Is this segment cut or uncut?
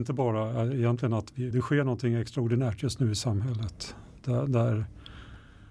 cut